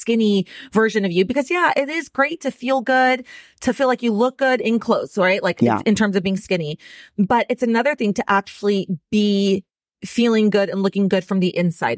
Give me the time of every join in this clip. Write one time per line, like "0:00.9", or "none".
none